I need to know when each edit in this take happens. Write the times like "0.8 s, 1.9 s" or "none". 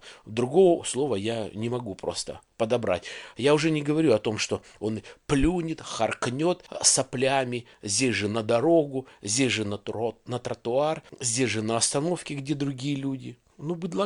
3.3 s